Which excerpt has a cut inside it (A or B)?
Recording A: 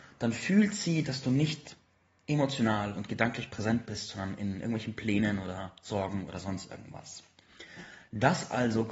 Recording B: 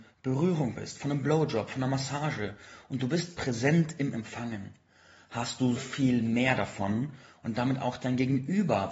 B